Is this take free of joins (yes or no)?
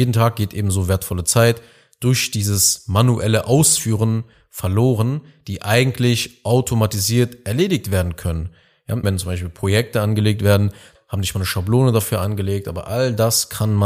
no